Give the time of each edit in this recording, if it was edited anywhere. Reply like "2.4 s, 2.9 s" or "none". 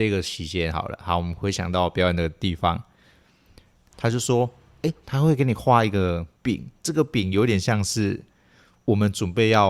3.9 s, 5.0 s, 6.3 s